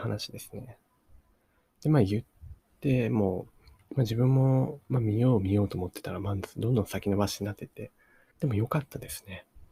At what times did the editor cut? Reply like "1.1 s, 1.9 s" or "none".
8.3 s